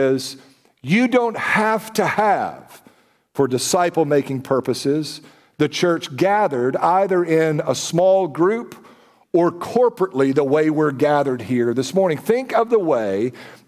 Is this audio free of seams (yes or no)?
yes